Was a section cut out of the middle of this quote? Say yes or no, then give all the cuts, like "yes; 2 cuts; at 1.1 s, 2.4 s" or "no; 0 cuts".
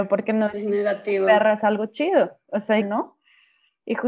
yes; 1 cut; at 2.8 s